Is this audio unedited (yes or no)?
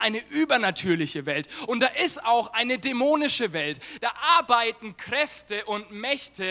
no